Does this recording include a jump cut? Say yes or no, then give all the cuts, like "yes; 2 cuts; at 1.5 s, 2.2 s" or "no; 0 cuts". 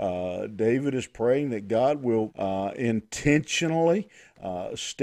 yes; 1 cut; at 2.3 s